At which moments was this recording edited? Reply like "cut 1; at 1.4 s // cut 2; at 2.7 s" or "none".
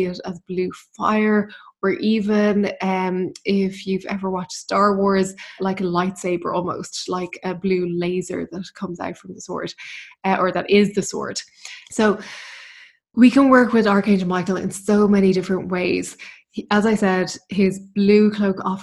cut 1; at 5.6 s // cut 2; at 11.8 s